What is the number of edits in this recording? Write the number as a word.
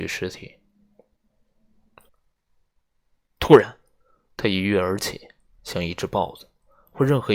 one